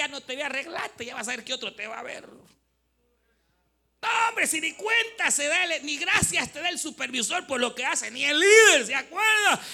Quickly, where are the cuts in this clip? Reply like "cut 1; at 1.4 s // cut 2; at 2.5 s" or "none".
none